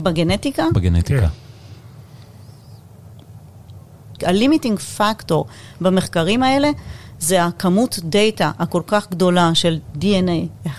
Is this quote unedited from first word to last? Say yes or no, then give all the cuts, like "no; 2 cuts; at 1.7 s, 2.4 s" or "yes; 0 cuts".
no; 1 cut; at 4.2 s